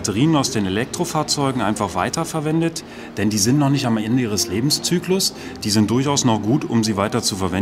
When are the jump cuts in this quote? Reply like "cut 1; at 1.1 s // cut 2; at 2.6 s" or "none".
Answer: none